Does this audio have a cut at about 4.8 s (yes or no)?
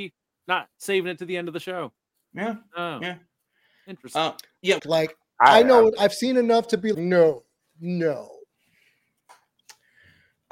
yes